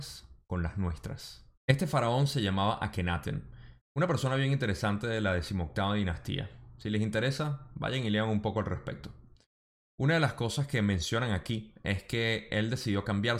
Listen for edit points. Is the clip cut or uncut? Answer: cut